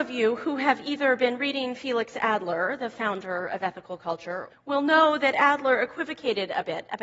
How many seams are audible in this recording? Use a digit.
1